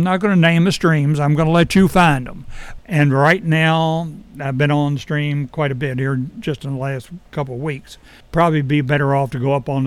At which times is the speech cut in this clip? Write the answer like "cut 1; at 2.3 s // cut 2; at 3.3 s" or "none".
cut 1; at 2.8 s // cut 2; at 8.2 s

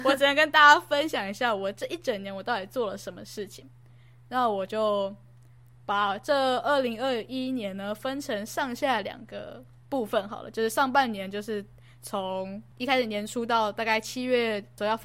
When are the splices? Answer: none

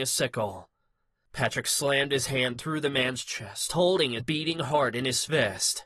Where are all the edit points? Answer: cut 1; at 4.2 s

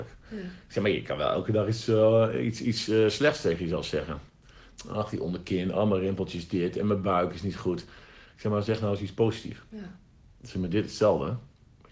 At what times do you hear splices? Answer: none

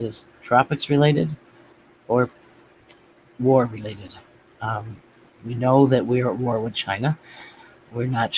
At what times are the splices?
none

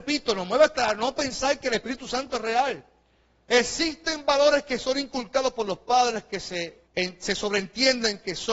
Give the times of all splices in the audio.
cut 1; at 3.5 s // cut 2; at 6.9 s

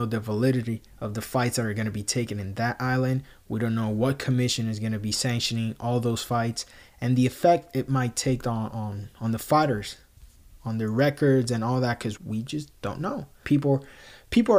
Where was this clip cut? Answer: cut 1; at 12.2 s // cut 2; at 13.4 s

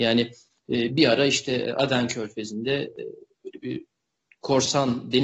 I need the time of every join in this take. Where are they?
none

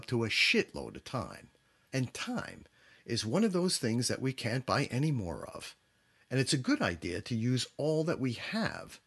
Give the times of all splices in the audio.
none

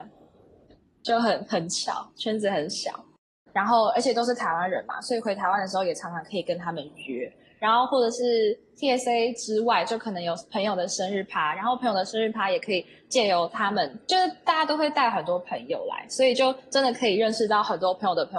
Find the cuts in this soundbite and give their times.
cut 1; at 3.5 s

